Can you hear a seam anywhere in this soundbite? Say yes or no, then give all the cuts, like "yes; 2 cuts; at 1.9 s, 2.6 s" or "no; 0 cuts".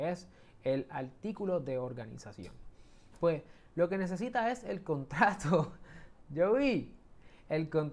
yes; 1 cut; at 3.2 s